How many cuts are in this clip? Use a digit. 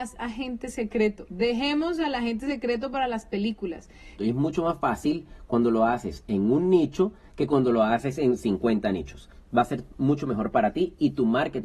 1